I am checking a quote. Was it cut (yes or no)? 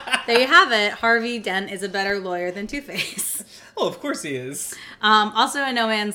no